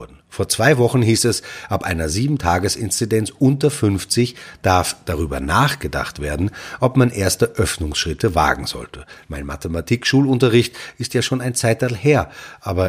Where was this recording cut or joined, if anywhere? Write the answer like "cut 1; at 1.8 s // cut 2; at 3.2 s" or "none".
cut 1; at 9.3 s